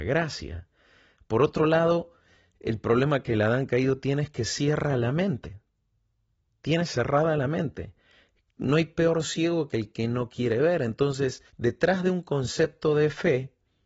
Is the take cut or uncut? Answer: cut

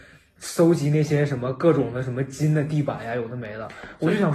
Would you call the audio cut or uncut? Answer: uncut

